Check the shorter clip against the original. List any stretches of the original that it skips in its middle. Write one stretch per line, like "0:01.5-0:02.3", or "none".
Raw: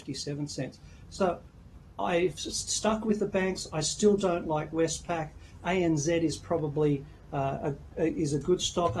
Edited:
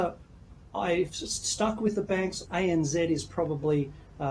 0:03.7-0:05.6